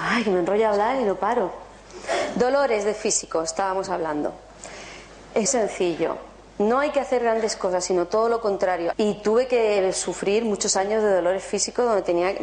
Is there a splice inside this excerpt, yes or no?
yes